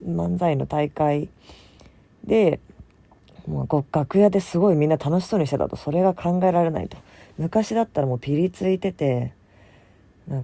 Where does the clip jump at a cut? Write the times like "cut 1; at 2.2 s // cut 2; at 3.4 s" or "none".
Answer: none